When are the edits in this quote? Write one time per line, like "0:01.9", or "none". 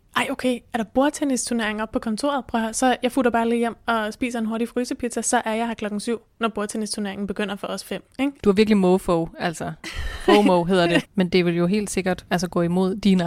0:11.0